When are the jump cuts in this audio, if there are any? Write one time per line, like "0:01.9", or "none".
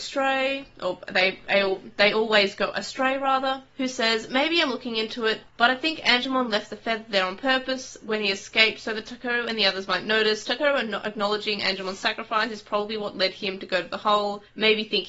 none